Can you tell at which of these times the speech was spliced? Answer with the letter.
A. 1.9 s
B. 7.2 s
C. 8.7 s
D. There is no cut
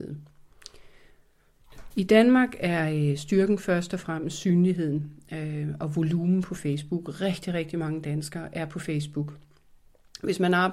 A